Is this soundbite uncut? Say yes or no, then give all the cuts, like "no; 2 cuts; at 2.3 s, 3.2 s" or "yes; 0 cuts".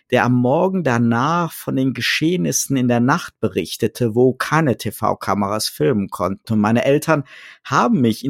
no; 1 cut; at 6.4 s